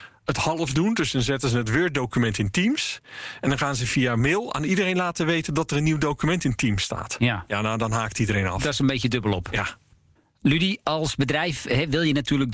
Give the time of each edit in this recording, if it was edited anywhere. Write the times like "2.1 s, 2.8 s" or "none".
none